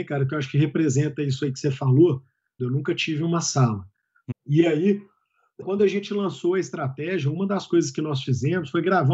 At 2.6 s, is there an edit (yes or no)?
yes